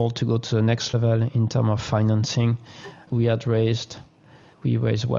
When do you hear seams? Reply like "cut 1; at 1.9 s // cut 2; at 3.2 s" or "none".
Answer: none